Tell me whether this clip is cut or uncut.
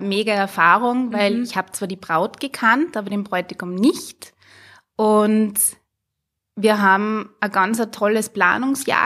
uncut